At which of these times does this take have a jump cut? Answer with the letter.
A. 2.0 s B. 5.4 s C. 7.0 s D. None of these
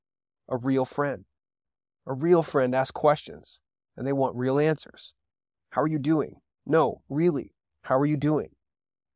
D